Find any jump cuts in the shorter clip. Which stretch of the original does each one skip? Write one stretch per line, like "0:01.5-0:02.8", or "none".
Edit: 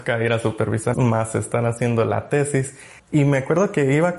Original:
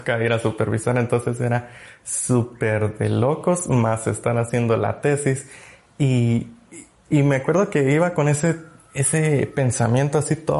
0:00.9-0:03.7
0:05.7-0:07.0